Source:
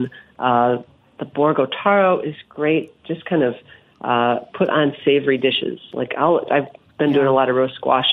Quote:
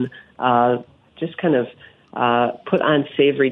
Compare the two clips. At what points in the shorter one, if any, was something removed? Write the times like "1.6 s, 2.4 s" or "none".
1.1 s

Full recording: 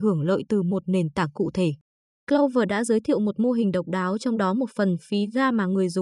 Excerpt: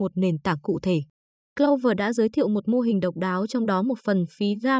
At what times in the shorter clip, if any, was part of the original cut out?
none

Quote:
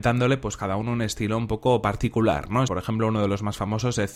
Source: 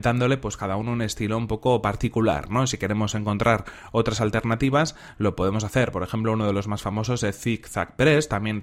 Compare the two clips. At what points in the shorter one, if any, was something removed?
2.7 s

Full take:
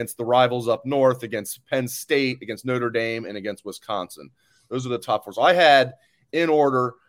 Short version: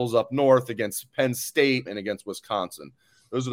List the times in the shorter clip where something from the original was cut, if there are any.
1.9 s

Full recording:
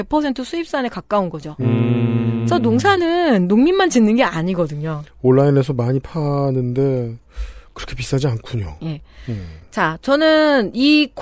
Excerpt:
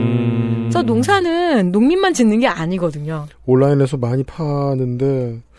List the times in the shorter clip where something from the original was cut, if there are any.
none

